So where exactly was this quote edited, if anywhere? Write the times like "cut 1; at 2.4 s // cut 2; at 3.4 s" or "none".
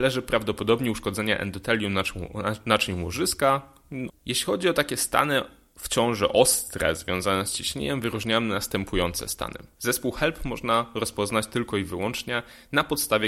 cut 1; at 4.1 s // cut 2; at 9.8 s